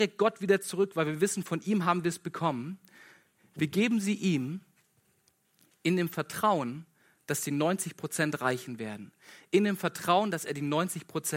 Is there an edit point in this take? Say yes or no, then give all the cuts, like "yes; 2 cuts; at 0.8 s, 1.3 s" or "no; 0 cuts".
no; 0 cuts